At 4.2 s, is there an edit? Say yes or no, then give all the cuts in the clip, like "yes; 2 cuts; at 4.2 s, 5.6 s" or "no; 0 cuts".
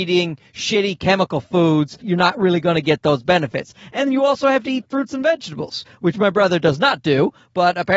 no; 1 cut; at 2.0 s